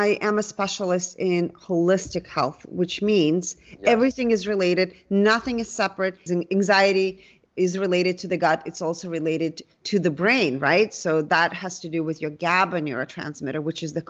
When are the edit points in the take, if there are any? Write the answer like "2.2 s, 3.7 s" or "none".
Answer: 6.3 s